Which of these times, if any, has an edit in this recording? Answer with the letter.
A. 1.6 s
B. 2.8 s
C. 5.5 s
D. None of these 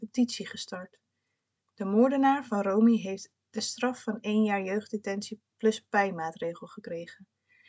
A